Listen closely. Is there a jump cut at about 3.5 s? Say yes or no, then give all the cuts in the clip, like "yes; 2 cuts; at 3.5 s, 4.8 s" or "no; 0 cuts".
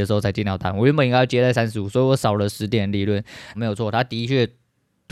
yes; 1 cut; at 3.5 s